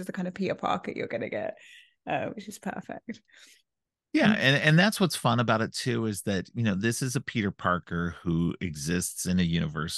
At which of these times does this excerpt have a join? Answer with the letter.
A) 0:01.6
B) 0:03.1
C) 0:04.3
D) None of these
D